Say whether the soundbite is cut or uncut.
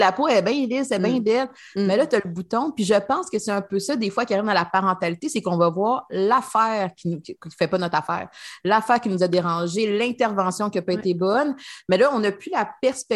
uncut